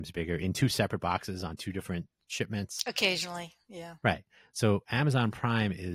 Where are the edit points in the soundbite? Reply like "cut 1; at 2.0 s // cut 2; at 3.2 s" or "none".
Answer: none